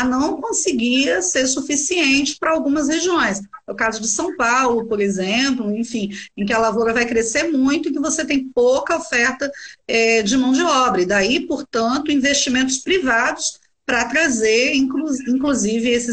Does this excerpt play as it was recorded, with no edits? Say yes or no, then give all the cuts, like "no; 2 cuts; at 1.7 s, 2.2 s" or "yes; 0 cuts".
yes; 0 cuts